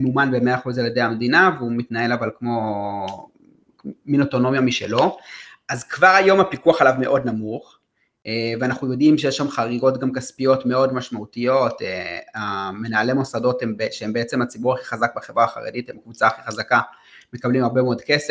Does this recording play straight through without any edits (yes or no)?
yes